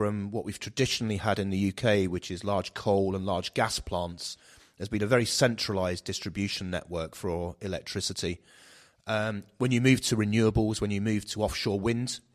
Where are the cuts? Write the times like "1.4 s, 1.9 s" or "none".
none

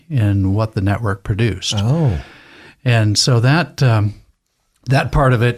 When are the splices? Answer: none

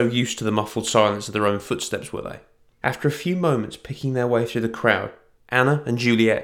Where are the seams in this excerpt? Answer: 2.8 s, 5.4 s

